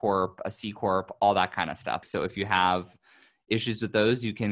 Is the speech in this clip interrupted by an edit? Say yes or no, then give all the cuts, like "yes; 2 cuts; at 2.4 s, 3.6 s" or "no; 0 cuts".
yes; 1 cut; at 2.0 s